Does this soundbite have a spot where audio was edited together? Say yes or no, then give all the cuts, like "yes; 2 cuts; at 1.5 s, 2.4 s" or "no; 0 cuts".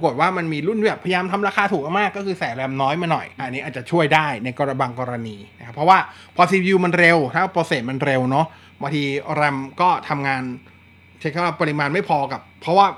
yes; 1 cut; at 3.4 s